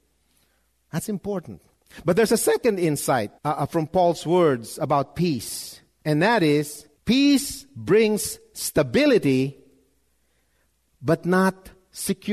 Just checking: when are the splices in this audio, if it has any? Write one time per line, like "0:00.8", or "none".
0:03.4
0:07.0